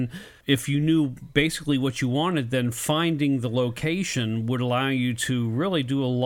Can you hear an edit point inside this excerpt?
no; 0 cuts

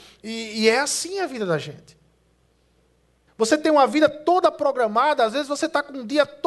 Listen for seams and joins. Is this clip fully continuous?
no; 1 cut; at 3.3 s

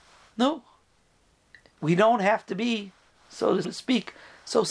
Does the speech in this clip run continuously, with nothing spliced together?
no; 1 cut; at 3.6 s

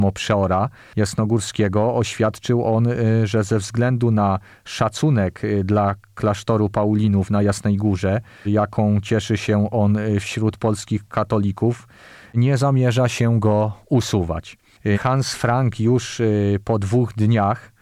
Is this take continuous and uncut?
no; 2 cuts; at 8.5 s, 14.9 s

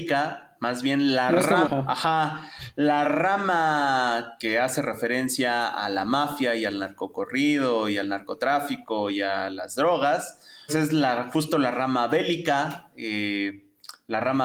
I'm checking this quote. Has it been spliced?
yes; 2 cuts; at 1.6 s, 10.7 s

